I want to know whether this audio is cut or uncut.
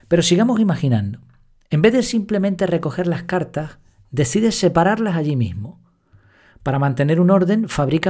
uncut